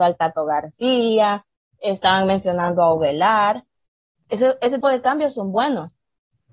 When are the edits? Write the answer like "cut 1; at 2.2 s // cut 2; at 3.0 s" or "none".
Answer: cut 1; at 4.8 s